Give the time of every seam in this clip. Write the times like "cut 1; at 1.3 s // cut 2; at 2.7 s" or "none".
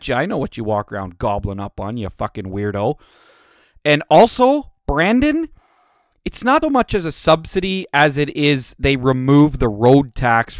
cut 1; at 6.6 s